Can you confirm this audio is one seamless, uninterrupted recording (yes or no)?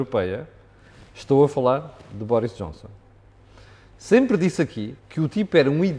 no